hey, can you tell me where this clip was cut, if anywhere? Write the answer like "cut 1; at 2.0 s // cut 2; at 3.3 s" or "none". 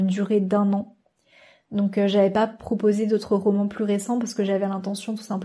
none